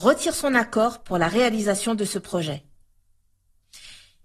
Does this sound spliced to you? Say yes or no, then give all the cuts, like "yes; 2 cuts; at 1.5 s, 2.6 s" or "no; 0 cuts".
no; 0 cuts